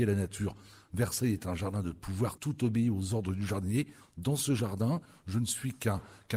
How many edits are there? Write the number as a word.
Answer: one